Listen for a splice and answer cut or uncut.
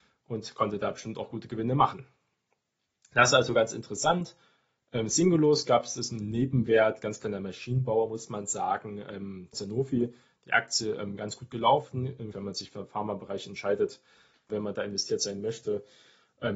cut